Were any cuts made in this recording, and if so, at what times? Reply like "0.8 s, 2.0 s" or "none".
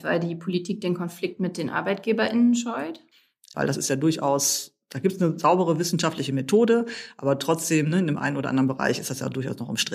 3.5 s